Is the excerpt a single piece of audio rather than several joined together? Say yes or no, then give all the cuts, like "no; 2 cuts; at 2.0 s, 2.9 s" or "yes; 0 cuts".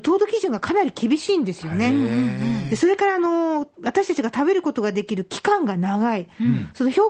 no; 1 cut; at 3.7 s